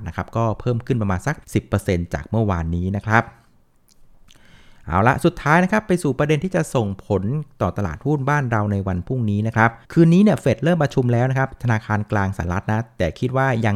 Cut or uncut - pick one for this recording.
cut